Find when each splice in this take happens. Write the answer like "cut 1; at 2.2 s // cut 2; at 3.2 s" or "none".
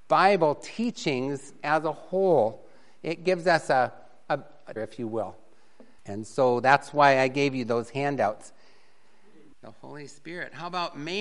cut 1; at 4.8 s // cut 2; at 6.0 s // cut 3; at 9.5 s